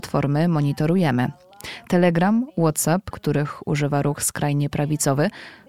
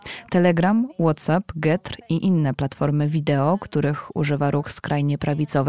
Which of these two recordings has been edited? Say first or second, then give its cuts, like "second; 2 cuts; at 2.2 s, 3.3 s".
first; 1 cut; at 3.1 s